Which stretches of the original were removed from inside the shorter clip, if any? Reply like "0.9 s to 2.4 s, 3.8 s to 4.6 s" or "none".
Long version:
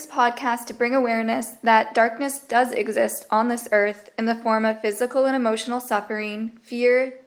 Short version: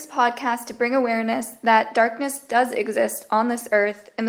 none

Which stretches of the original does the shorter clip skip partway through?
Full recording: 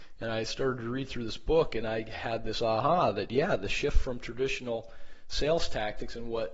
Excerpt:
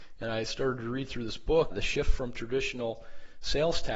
1.7 s to 3.6 s

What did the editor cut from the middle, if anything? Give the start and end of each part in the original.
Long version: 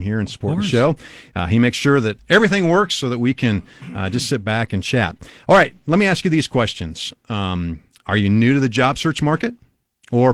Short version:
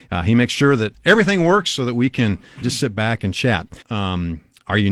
3.9 s to 4.1 s, 5.3 s to 7.2 s

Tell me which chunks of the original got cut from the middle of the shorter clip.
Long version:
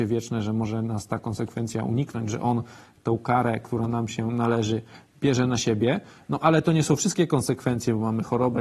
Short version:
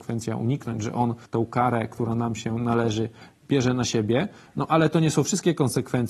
2.7 s to 3.0 s

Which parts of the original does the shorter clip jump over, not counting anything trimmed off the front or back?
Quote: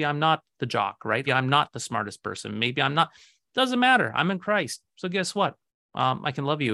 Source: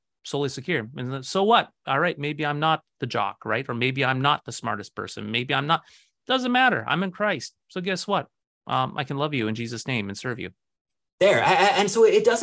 3.7 s to 4.0 s

